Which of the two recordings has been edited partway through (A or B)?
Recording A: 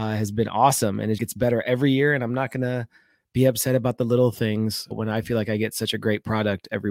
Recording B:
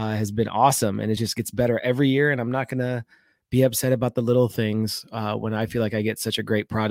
A